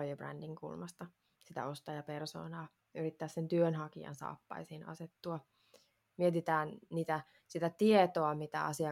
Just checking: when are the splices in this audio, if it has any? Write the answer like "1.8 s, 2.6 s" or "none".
6.1 s